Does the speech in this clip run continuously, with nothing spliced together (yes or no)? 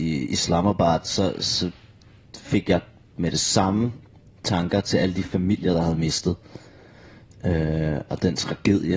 yes